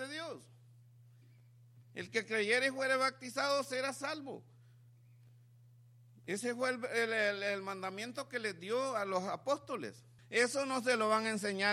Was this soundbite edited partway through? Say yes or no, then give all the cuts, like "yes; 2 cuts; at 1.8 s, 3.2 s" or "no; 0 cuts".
yes; 1 cut; at 10.2 s